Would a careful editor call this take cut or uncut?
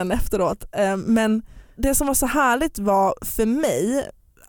cut